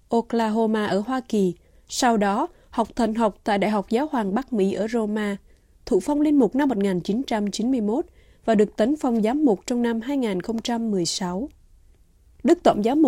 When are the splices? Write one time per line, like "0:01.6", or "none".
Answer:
0:01.9